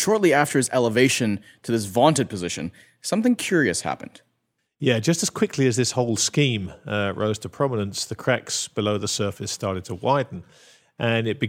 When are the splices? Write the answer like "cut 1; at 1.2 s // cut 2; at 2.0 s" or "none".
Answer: none